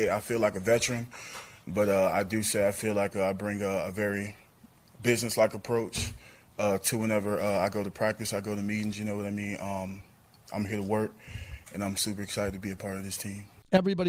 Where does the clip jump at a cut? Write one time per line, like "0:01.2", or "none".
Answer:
none